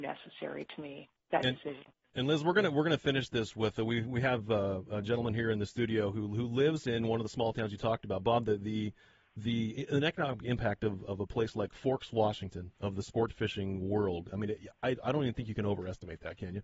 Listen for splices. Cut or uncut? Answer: uncut